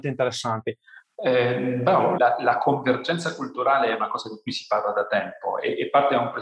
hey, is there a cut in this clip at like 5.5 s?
no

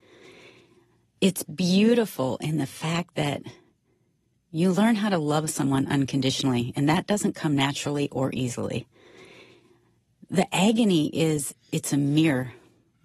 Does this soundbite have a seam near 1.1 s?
no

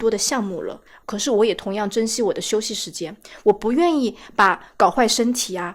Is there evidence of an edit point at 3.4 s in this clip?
no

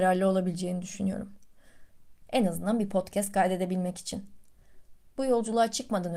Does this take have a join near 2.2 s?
yes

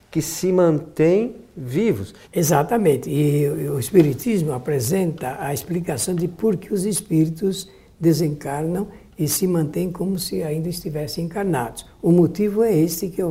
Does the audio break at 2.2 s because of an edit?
yes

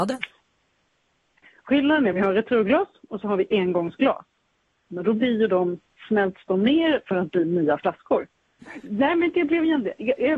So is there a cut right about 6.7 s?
no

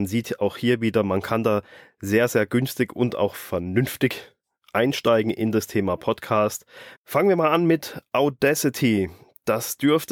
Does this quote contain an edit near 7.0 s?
yes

